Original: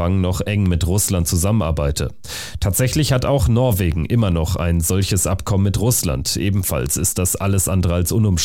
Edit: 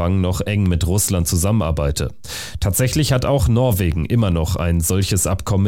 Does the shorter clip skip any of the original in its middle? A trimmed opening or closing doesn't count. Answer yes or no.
no